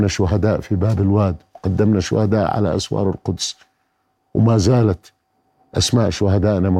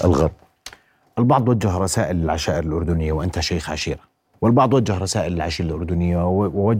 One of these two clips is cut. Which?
second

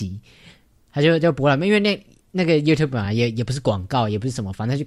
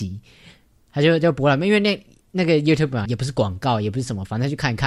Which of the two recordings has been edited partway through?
second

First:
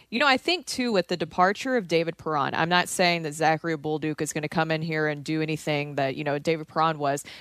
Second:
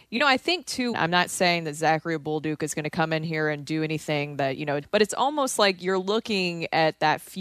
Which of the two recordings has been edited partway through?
second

